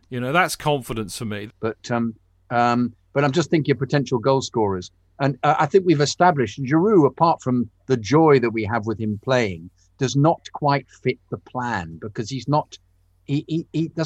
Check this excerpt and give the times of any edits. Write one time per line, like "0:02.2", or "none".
0:01.5